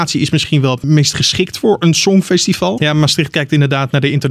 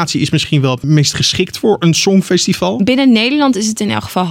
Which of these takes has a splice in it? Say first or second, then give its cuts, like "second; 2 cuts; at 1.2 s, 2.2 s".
first; 1 cut; at 2.8 s